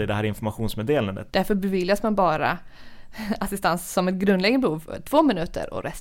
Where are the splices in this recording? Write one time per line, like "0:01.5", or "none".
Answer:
0:01.3